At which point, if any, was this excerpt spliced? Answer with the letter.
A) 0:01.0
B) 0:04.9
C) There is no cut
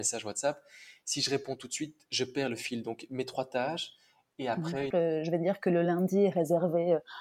B